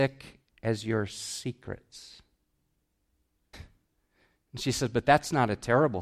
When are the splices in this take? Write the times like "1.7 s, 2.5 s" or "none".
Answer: 3.5 s